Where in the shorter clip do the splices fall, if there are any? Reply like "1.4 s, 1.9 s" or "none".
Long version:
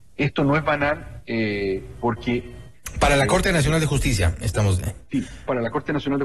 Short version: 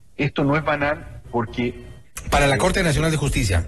1.2 s